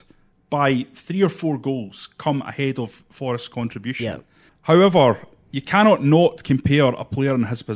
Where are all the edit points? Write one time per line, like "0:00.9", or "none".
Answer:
0:04.5